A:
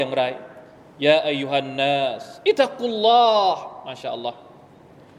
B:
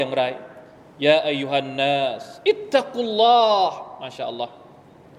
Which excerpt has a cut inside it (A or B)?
A